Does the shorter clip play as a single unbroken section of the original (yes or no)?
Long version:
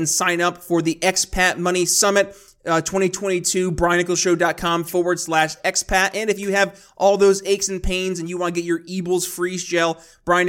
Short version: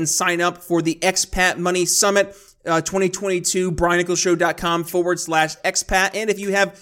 yes